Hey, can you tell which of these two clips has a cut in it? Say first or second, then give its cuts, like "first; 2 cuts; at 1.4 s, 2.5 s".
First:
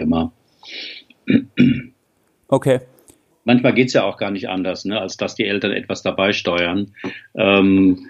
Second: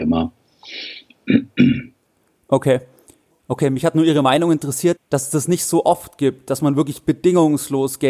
second; 2 cuts; at 3.4 s, 5.0 s